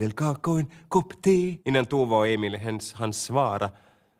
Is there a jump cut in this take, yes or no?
yes